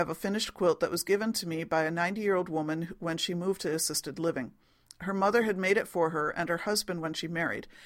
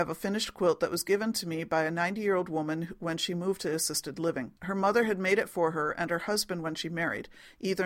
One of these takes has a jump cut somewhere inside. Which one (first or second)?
second